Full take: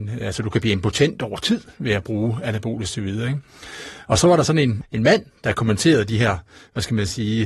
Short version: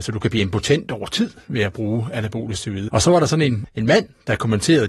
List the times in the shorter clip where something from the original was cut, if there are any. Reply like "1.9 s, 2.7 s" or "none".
2.9 s